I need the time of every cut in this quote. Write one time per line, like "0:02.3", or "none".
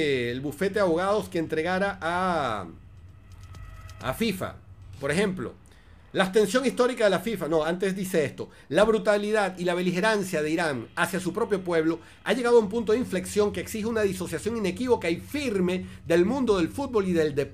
none